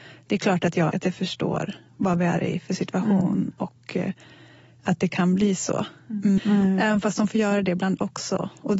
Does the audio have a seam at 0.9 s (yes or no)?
yes